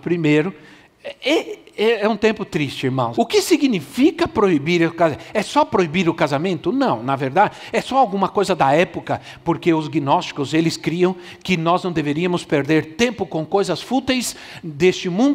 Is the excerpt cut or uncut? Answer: cut